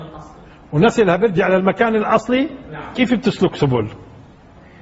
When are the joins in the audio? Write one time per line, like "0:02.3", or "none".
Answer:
0:02.9

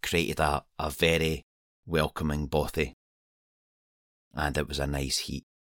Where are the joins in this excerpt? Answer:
0:01.8

